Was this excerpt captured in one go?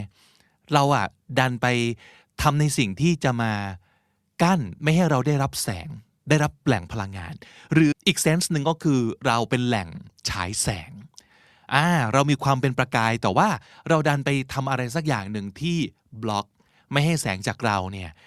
no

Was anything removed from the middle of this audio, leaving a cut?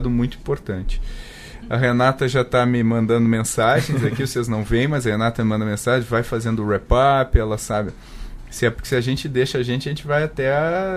yes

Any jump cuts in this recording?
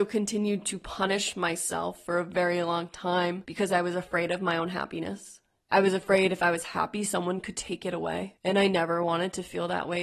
no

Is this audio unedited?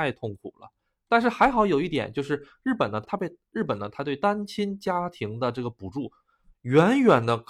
no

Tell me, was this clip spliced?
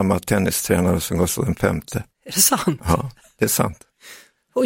yes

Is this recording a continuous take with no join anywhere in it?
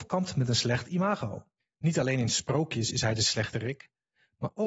no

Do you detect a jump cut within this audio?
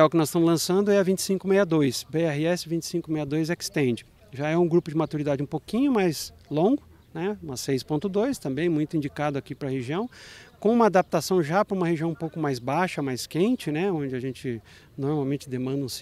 no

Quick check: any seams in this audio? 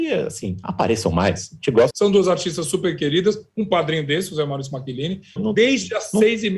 yes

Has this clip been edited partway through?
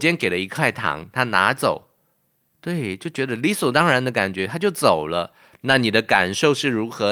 no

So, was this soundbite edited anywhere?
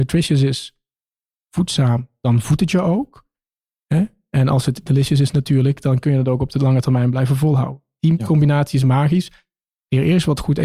no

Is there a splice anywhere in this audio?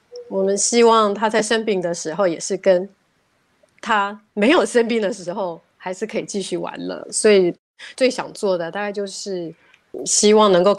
yes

